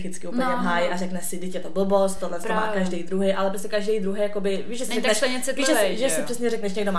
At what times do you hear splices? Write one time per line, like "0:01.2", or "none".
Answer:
none